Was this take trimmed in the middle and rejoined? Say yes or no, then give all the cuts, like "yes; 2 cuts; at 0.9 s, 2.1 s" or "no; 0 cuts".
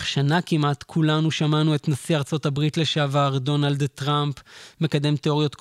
no; 0 cuts